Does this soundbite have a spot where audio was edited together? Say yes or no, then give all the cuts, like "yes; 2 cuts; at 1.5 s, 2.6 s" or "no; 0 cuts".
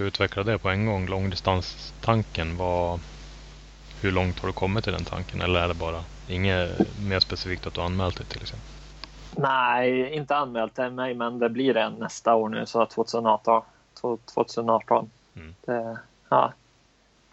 no; 0 cuts